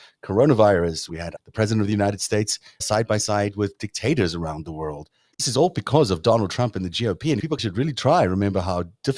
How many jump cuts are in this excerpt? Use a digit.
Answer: 2